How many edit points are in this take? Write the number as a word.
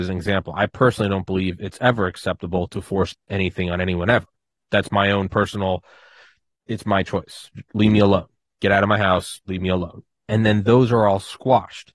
one